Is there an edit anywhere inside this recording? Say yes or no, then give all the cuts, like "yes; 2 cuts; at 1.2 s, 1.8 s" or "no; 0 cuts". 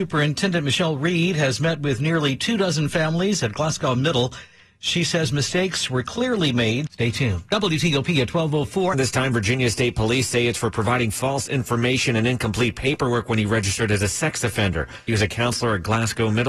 yes; 3 cuts; at 6.9 s, 8.9 s, 15.1 s